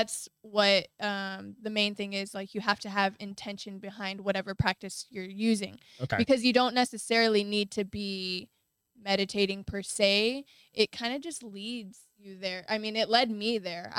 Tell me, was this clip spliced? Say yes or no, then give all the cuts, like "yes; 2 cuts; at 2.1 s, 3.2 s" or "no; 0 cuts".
no; 0 cuts